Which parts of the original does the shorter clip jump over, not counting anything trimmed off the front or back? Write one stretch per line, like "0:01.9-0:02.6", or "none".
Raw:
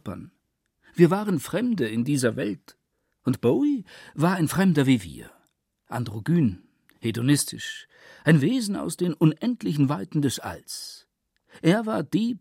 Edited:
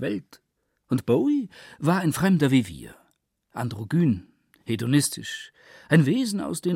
none